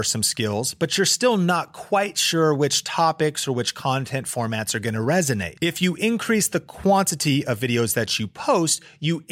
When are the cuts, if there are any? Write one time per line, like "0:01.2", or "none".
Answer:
none